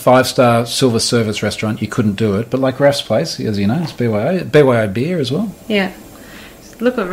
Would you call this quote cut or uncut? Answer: uncut